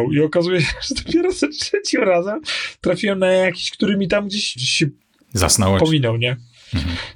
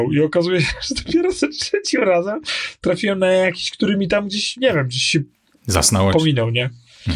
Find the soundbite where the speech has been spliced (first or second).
first